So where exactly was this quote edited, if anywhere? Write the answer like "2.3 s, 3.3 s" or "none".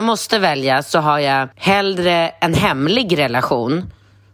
1.5 s

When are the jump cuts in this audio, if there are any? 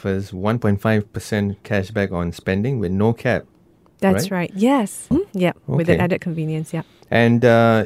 5.1 s

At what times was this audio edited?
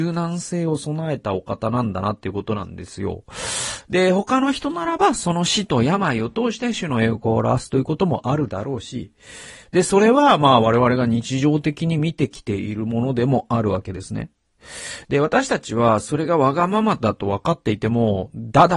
3.8 s, 15.0 s

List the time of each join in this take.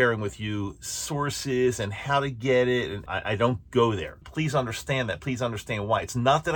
3.1 s, 4.2 s

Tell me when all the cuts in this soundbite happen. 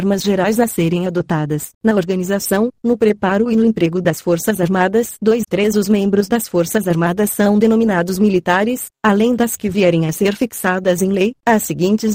1.7 s, 5.4 s, 8.9 s

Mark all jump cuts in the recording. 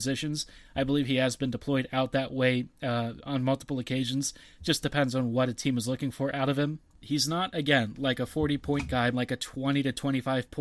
7.0 s, 9.1 s

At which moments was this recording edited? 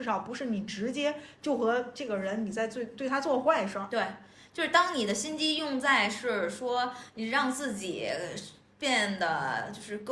none

